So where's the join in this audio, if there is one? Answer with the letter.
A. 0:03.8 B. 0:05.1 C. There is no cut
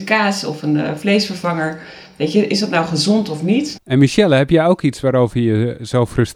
A